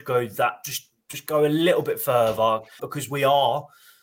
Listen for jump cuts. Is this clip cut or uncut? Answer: cut